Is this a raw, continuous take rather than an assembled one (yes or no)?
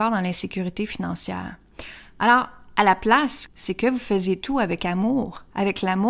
no